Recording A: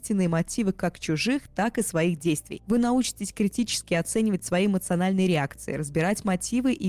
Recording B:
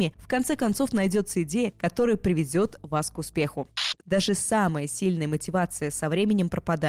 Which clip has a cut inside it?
B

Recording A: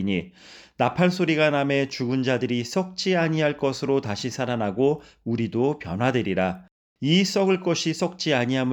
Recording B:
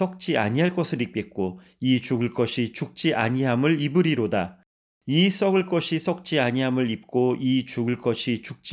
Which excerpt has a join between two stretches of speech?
A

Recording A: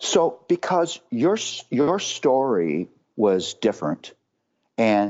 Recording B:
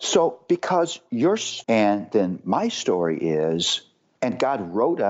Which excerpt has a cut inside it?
B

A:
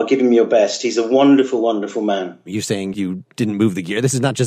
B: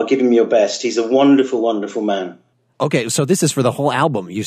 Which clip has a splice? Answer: A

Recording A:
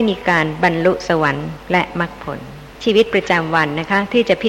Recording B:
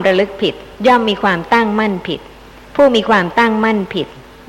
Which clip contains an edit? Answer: A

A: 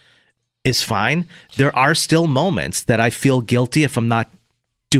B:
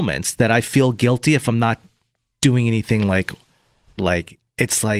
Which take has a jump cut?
B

